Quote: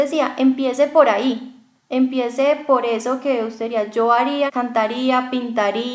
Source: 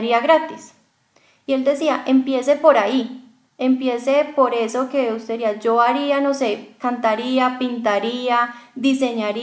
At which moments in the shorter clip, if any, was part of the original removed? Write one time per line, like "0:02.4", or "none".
0:04.5